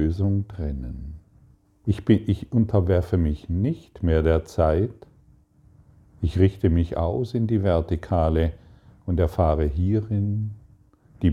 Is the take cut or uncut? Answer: cut